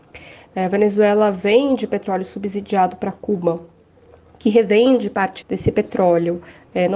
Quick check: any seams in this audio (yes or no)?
yes